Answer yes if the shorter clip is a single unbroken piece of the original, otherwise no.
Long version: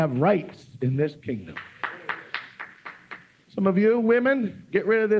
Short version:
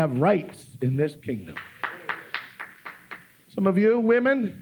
yes